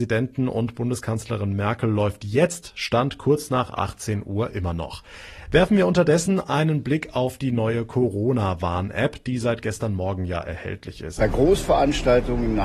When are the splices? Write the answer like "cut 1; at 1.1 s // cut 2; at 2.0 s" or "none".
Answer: cut 1; at 11.2 s